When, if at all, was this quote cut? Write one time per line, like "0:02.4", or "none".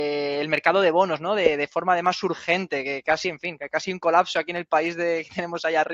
none